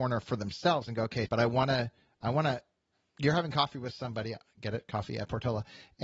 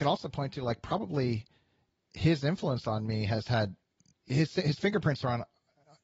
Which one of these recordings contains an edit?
first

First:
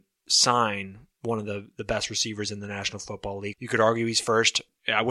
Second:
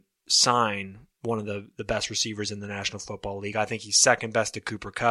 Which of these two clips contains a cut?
first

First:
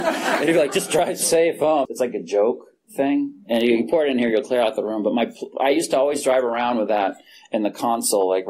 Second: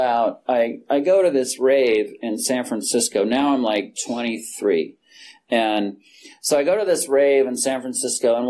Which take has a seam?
first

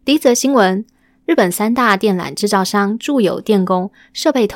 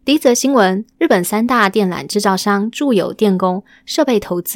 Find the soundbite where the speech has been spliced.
second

